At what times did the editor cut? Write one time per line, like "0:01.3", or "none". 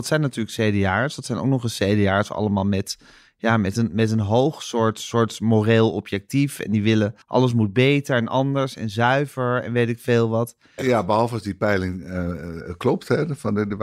0:07.2
0:10.8